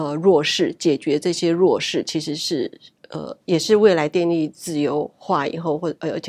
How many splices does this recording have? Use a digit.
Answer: 0